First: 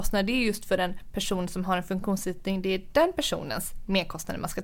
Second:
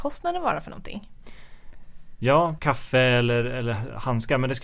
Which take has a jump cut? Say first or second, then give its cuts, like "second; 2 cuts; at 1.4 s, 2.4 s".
second; 1 cut; at 2.6 s